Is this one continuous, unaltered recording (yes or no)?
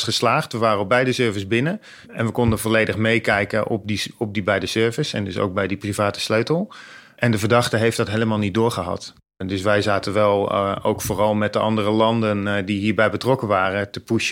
yes